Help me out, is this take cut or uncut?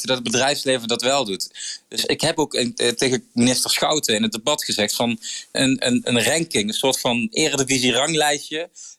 cut